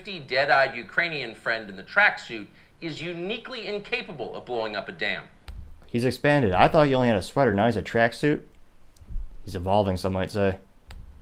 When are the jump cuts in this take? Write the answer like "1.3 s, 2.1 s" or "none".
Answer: none